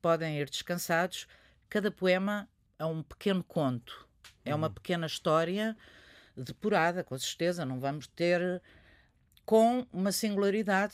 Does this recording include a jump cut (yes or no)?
no